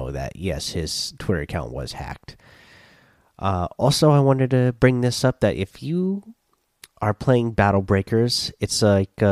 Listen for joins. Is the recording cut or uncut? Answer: uncut